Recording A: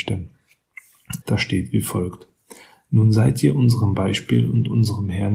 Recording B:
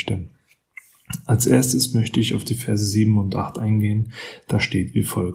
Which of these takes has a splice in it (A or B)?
A